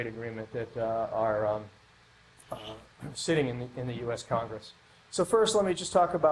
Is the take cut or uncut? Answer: cut